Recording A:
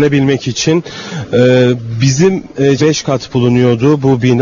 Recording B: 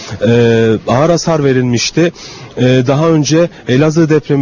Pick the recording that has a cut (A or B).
A